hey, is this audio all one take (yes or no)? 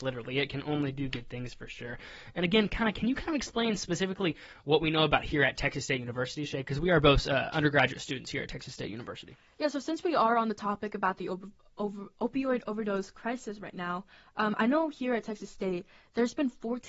yes